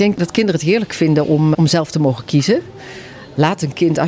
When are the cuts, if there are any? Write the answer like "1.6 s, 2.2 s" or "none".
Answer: 1.5 s